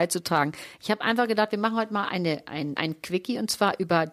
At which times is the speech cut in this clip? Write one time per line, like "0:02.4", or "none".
0:02.8